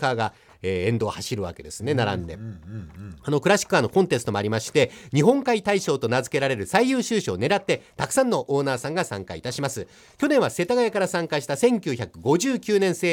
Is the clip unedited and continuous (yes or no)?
yes